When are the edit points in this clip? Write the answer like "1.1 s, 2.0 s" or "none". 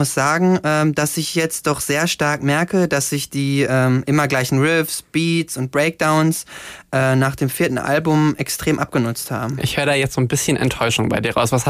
none

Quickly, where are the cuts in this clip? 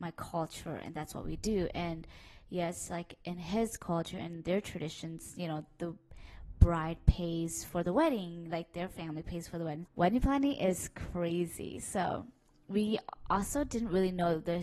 9.9 s

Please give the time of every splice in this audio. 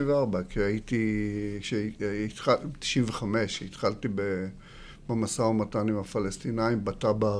none

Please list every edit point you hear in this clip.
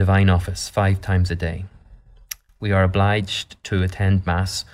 none

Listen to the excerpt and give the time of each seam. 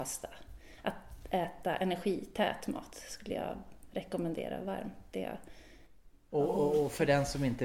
none

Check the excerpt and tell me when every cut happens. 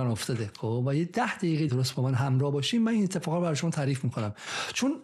1.7 s

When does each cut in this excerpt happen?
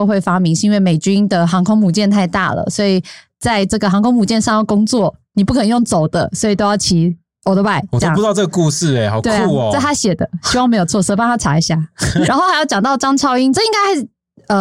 12.3 s, 13.5 s

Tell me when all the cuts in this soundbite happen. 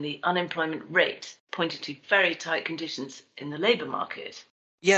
none

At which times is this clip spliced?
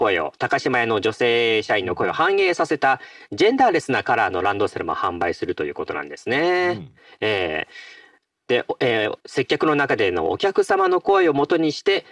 none

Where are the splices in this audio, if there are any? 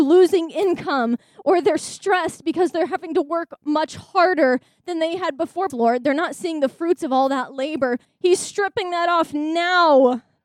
5.7 s, 8.0 s

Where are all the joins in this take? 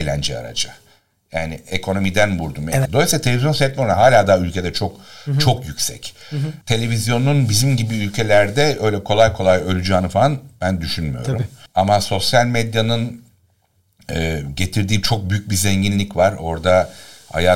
2.9 s

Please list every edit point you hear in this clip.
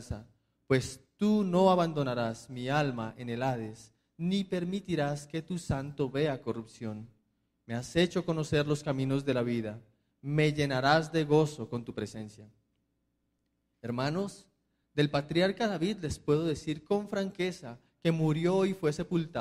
none

